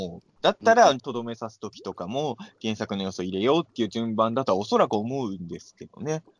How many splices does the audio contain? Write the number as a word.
one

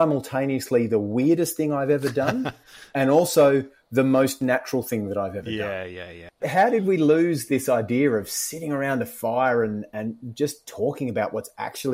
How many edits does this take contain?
two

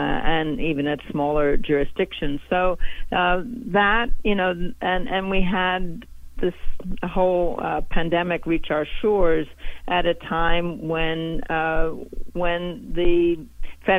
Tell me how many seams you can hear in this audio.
zero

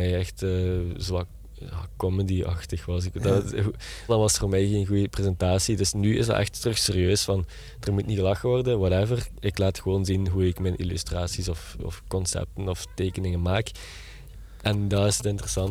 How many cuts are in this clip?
one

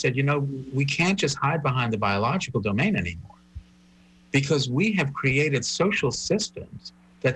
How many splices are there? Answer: zero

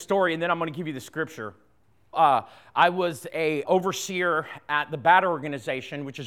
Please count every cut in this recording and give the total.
two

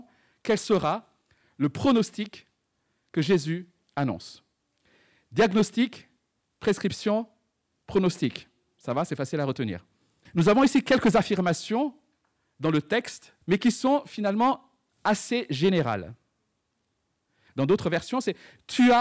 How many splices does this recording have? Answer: three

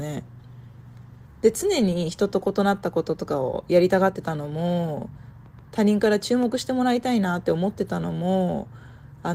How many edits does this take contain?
one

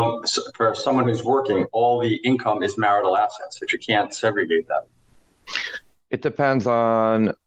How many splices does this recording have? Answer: zero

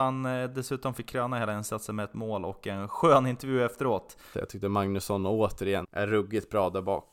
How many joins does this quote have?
two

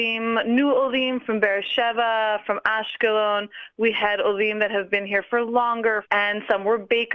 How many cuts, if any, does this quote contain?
one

